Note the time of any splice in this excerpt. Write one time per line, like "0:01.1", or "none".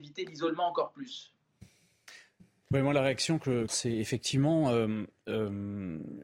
0:02.6
0:03.7

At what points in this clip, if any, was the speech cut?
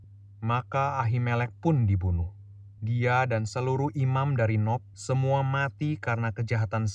0:04.9

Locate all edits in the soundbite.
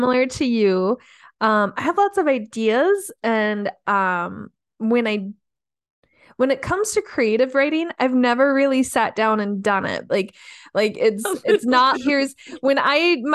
0:10.1
0:11.9

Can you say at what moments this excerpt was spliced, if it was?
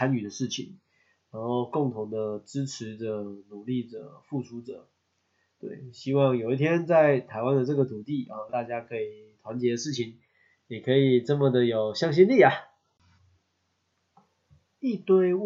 0:08.5

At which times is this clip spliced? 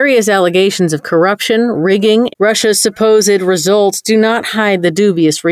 0:02.3

